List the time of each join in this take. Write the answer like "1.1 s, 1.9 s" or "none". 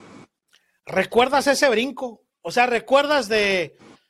none

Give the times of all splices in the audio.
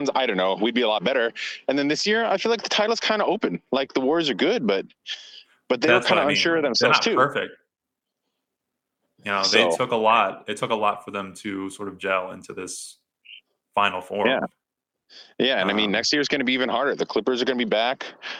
none

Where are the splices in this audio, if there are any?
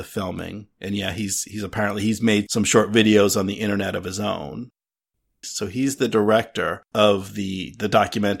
5.4 s, 6.9 s

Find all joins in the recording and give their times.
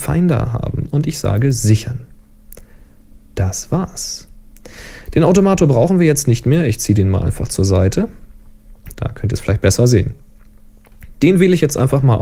8.9 s

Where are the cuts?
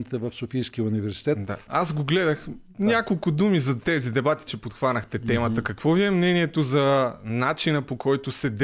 1.6 s, 4.5 s

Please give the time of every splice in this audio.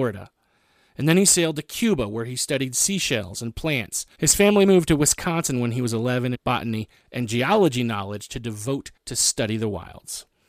4.1 s, 6.3 s, 9.0 s

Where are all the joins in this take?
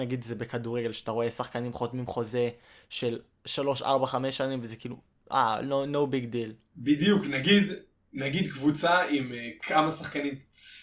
none

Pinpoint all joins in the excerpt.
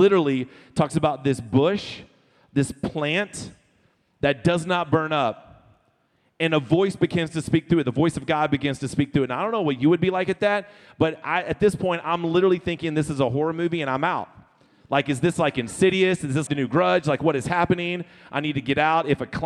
16.5 s

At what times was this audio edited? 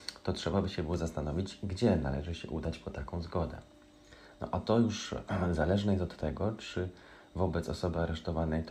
none

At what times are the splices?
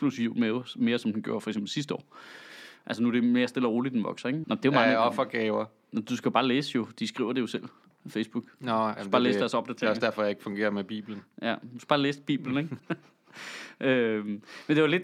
4.4 s, 12.8 s

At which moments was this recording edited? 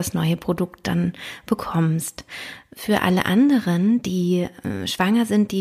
none

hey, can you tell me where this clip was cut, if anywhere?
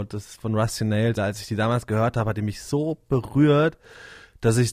1.2 s

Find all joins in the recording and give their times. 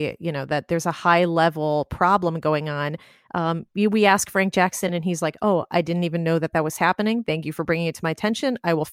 none

